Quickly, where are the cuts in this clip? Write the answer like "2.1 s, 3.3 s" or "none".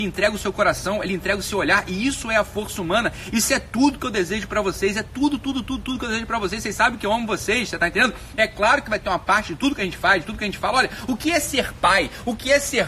none

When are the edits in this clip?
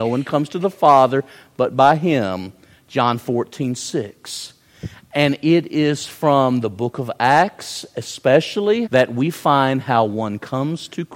8.9 s

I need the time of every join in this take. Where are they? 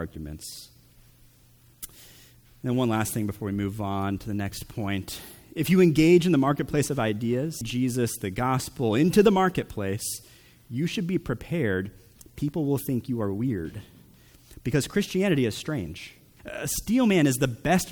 7.6 s, 16.4 s

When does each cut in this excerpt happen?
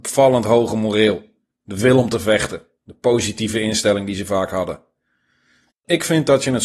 5.7 s

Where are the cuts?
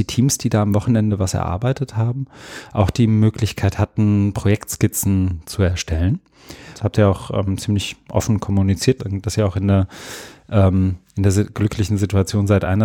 6.7 s, 9.0 s

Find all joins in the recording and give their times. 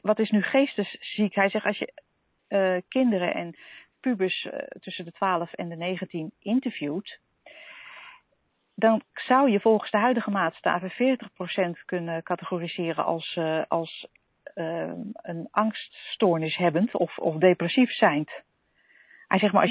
none

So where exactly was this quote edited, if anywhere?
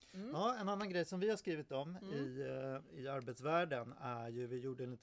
none

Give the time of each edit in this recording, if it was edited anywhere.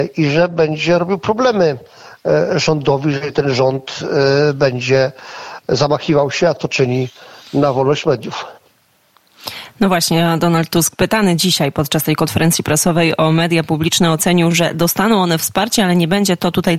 none

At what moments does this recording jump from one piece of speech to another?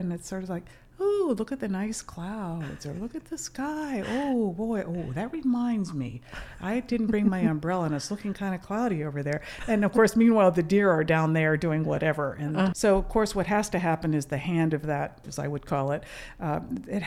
12.7 s, 15.2 s

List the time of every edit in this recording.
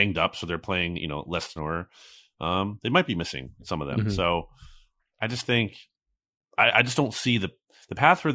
1.6 s

